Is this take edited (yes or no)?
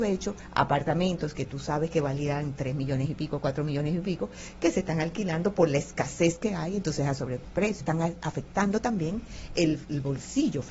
yes